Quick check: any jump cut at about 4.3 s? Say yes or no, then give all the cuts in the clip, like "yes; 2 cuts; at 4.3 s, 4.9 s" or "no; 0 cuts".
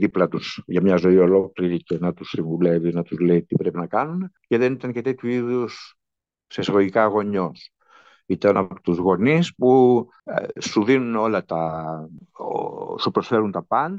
no; 0 cuts